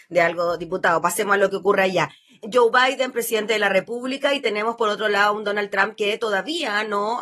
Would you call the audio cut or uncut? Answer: uncut